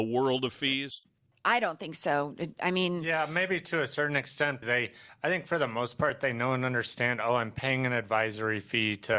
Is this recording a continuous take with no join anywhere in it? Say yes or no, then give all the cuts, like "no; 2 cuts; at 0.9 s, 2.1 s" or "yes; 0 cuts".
no; 1 cut; at 4.6 s